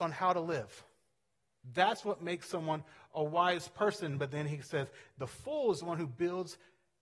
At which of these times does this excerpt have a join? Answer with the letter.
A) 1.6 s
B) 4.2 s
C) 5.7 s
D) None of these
A